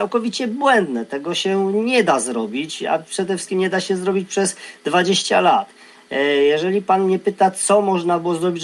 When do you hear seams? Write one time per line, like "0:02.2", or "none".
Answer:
none